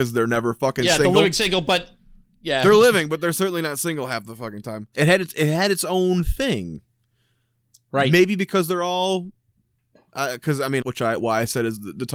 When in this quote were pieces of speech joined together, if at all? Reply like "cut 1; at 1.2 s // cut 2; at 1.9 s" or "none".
cut 1; at 4.9 s // cut 2; at 10.8 s